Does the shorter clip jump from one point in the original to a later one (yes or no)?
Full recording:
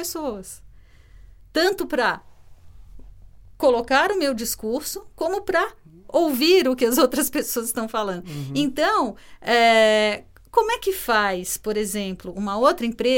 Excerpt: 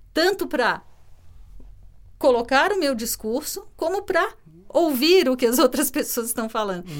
no